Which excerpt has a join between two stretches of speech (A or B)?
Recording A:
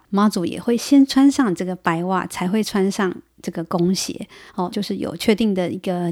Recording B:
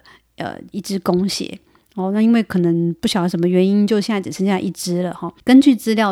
A